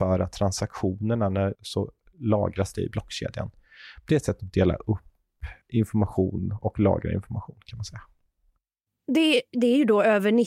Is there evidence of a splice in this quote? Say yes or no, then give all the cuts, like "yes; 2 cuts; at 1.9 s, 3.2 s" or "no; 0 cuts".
yes; 1 cut; at 1.5 s